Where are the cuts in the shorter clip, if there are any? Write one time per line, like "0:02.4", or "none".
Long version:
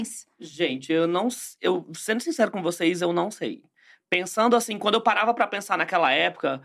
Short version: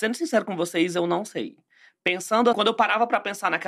0:02.5